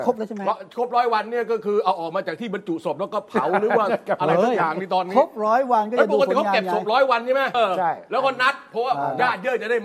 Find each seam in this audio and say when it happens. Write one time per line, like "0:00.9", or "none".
0:07.5